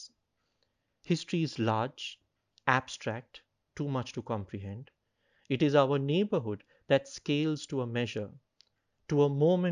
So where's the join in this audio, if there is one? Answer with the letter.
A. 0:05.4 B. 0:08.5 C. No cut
A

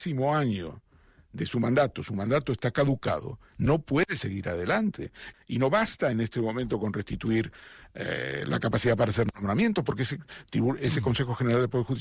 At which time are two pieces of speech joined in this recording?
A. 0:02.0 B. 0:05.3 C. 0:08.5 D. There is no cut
B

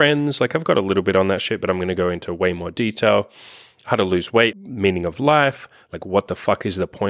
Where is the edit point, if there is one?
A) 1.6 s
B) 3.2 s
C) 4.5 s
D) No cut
C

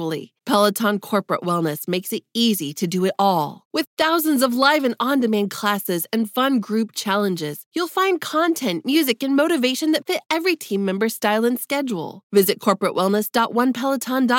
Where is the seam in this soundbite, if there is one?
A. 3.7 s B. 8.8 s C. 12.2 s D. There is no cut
D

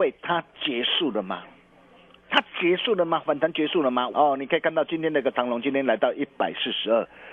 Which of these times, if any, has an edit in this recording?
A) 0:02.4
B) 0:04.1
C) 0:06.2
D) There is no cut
B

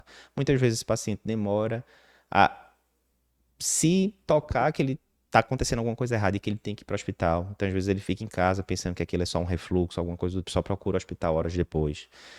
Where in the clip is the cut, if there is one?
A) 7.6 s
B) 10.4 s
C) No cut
B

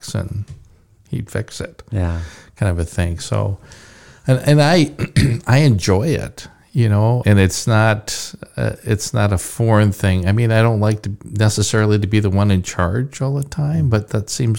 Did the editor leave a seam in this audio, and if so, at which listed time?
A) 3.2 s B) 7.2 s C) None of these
B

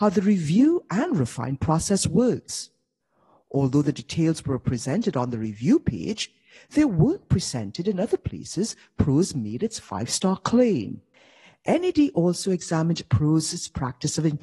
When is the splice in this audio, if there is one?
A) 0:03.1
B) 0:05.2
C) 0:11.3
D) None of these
D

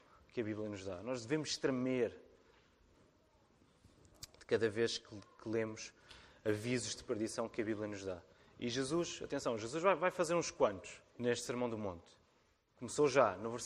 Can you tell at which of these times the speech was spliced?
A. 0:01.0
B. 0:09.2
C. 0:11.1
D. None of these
C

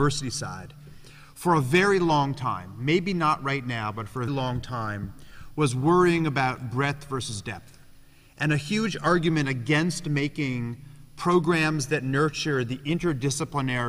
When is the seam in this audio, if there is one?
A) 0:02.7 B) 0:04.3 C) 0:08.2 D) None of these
B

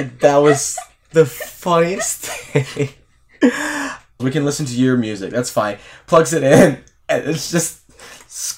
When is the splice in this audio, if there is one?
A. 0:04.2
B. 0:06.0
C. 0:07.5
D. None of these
A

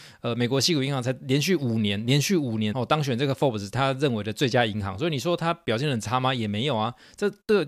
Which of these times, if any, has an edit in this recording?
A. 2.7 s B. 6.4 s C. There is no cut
A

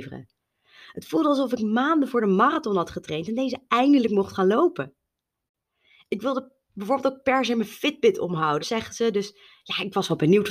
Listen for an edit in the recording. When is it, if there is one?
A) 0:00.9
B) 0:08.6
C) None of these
B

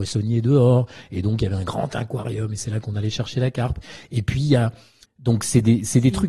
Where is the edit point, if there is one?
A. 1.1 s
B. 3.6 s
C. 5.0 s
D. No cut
C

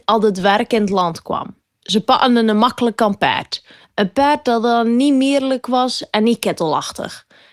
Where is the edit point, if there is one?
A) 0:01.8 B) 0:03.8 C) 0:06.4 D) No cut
D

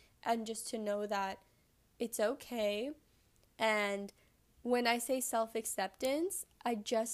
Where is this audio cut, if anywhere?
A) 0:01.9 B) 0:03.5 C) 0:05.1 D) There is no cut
B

